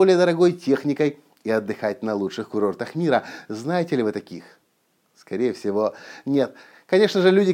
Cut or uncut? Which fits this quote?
uncut